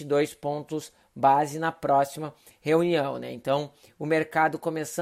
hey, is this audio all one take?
yes; 0 cuts

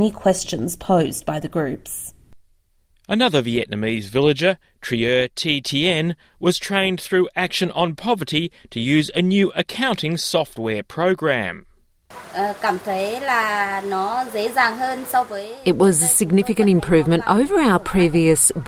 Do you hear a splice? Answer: no; 0 cuts

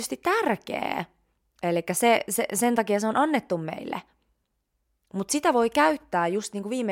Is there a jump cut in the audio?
no; 0 cuts

